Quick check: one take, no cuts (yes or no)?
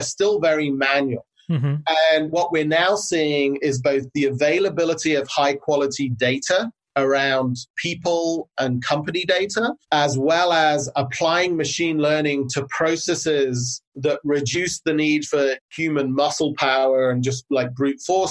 no